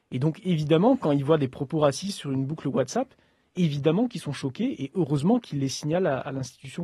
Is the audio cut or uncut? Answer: uncut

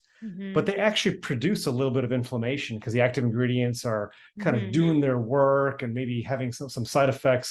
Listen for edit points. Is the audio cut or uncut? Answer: uncut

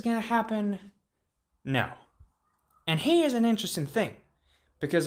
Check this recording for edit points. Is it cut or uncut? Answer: uncut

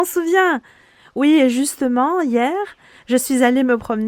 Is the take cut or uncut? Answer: uncut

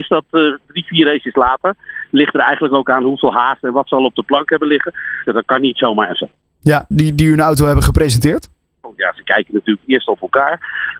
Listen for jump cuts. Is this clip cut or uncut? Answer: cut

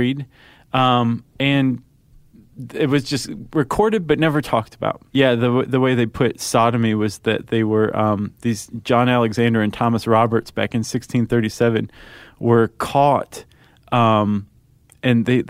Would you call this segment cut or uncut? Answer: cut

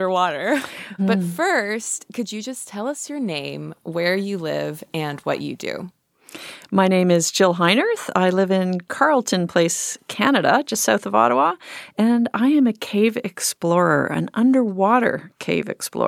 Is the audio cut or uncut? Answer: cut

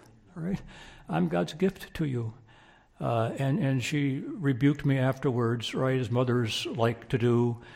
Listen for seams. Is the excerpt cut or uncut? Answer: uncut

